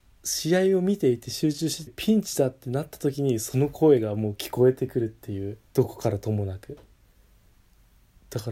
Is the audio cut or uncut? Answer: cut